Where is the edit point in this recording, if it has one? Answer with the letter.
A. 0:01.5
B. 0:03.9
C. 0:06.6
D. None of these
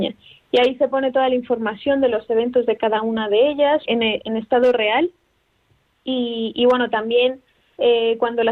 B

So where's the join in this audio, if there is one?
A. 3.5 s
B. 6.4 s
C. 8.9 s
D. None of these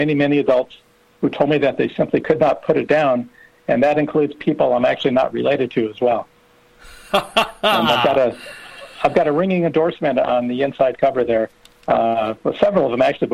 B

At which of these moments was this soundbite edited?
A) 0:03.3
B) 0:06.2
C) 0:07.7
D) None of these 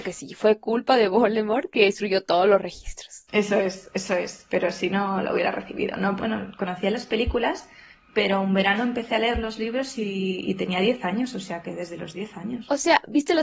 B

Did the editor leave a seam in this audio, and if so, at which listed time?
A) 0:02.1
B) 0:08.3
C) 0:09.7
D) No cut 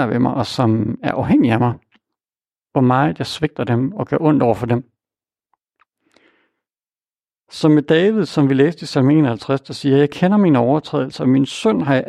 D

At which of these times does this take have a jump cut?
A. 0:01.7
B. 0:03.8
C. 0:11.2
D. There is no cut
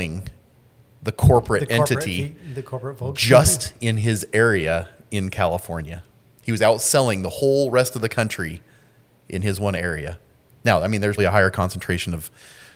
C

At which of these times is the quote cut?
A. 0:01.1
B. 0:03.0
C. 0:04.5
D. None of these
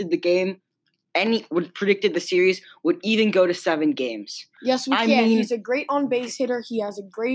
C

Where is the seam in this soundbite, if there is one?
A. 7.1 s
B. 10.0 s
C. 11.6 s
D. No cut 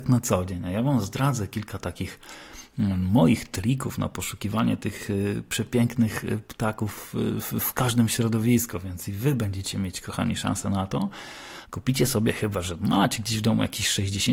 C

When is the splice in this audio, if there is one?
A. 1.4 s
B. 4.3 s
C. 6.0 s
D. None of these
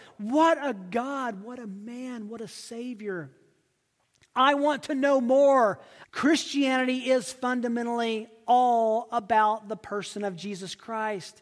C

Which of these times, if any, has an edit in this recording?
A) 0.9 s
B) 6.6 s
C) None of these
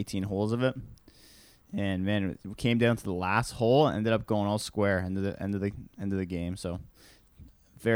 C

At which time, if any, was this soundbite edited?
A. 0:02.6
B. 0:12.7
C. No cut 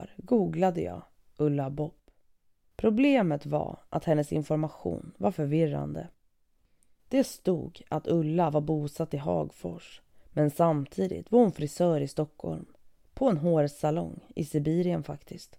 A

